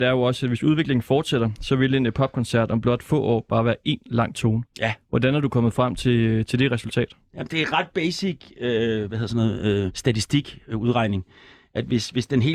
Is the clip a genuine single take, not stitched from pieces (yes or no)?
no